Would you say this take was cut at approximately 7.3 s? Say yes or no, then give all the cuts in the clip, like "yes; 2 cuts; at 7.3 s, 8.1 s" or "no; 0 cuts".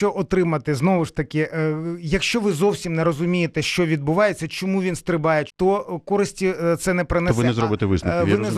no; 1 cut; at 5.5 s